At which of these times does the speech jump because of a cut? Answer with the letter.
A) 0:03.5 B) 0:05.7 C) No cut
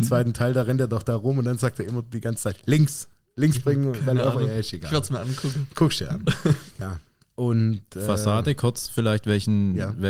A